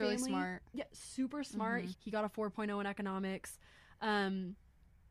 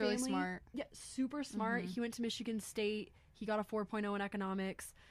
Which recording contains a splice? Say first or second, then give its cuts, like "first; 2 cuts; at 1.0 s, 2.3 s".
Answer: first; 1 cut; at 1.9 s